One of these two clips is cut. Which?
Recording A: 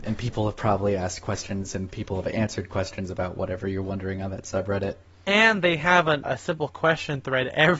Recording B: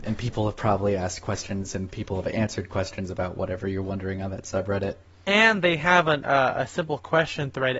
A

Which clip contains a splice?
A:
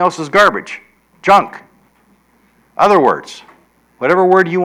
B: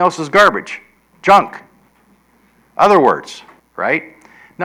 B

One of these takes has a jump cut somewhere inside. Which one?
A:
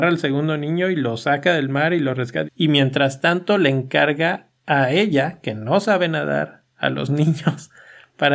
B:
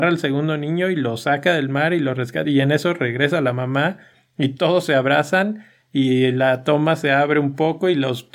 A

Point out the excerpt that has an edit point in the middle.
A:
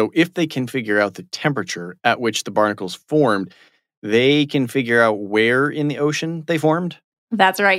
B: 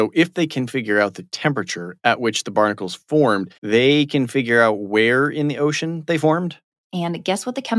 B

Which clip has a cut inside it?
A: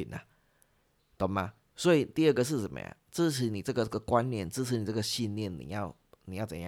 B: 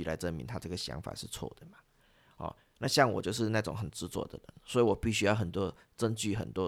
A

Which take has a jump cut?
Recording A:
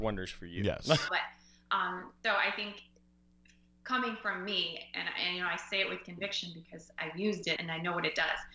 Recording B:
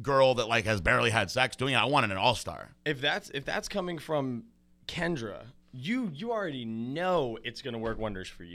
A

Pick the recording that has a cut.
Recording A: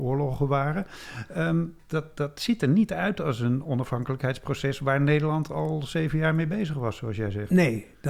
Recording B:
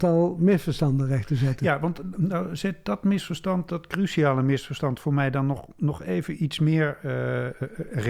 A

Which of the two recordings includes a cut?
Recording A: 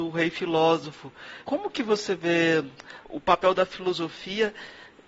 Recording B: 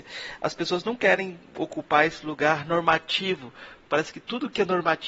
A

